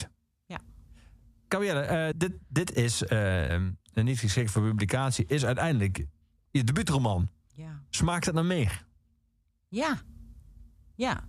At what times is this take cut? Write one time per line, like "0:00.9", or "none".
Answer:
0:02.1
0:03.5